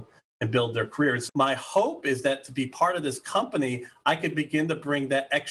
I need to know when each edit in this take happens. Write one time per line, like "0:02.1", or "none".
0:01.3